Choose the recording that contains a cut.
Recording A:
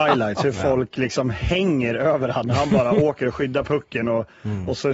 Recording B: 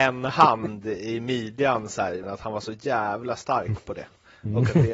B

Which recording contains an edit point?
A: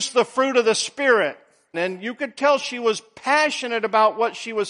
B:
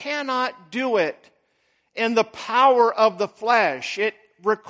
A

